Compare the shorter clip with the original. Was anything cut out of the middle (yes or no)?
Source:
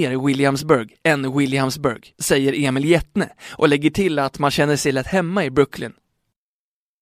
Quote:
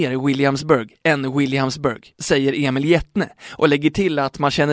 no